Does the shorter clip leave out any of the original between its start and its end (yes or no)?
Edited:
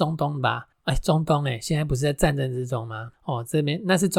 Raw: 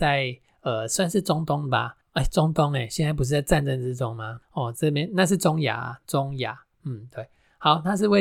no